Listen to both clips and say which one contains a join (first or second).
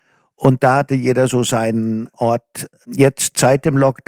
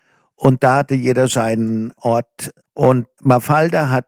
second